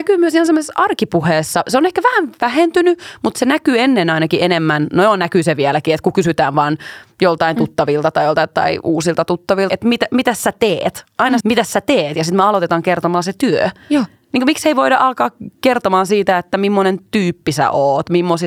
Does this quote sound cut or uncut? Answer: cut